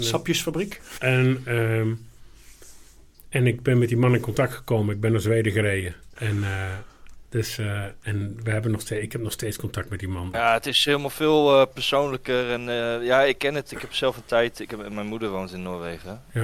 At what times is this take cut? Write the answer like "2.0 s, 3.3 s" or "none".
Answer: 1.0 s, 6.2 s, 10.3 s

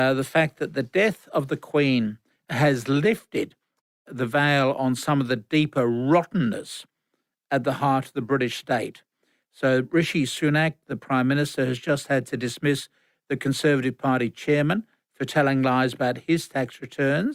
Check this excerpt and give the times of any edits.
none

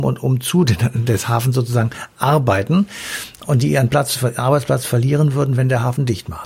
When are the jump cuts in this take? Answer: none

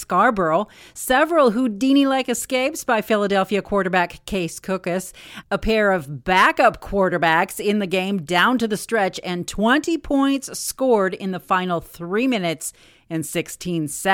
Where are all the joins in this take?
none

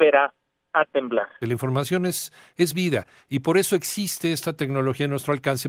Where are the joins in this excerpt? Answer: 1.4 s

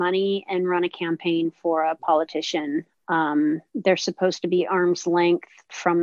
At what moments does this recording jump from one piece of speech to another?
none

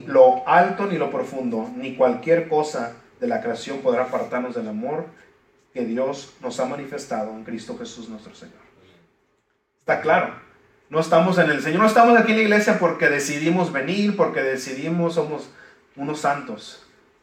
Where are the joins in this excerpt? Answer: none

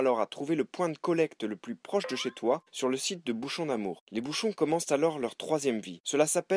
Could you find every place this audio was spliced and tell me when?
4.0 s

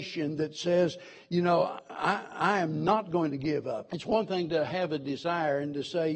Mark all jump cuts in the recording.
3.9 s

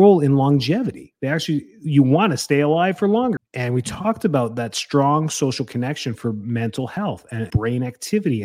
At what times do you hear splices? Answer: 3.4 s, 7.5 s

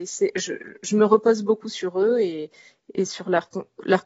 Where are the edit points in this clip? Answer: none

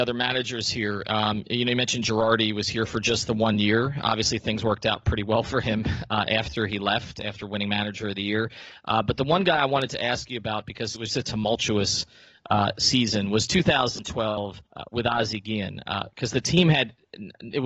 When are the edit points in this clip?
11.1 s

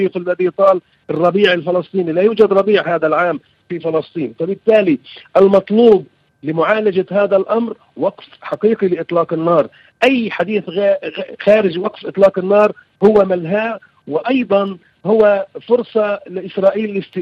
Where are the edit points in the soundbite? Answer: none

